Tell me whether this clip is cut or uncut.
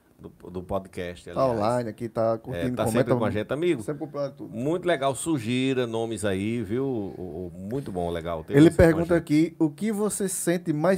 cut